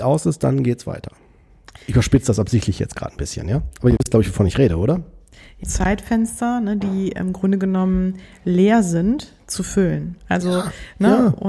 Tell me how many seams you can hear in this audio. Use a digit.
1